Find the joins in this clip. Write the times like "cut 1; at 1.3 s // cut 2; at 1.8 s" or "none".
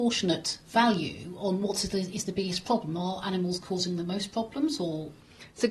none